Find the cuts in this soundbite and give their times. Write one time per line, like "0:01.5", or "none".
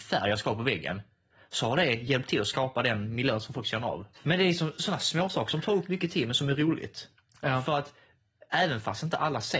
0:04.2